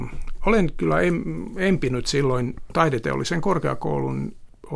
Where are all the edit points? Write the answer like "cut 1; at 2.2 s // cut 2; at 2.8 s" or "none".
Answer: cut 1; at 2.7 s